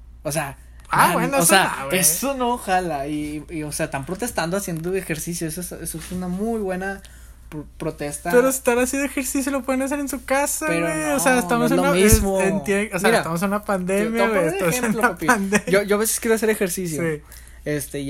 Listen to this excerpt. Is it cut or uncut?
uncut